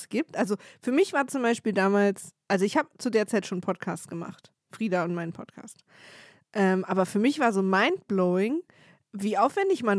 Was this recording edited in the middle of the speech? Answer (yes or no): no